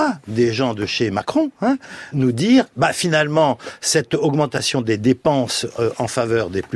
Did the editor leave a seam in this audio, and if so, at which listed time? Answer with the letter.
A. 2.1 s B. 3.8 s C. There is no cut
A